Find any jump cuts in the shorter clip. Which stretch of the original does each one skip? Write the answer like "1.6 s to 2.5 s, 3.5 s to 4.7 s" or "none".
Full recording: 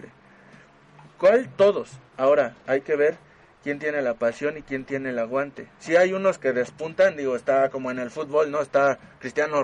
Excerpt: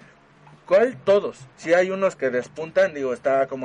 2.0 s to 5.7 s